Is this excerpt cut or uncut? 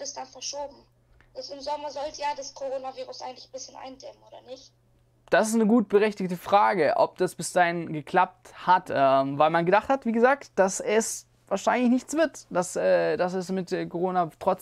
cut